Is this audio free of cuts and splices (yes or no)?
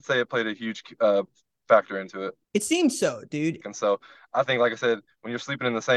no